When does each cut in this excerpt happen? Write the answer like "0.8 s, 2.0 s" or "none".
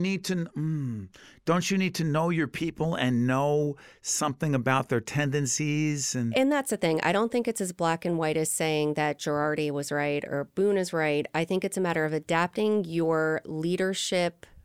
none